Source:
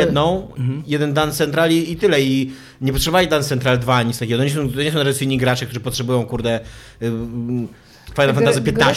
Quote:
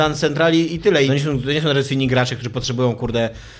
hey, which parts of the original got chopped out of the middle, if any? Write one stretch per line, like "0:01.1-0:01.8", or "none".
0:02.2-0:04.4